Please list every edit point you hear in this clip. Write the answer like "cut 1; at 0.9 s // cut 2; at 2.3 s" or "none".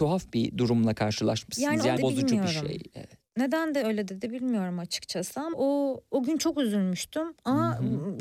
cut 1; at 2.0 s // cut 2; at 5.5 s